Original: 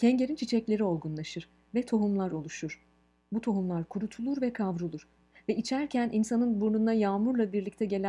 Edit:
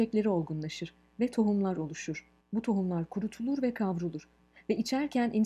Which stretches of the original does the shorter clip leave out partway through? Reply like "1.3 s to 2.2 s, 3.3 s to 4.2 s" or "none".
2.9 s to 3.2 s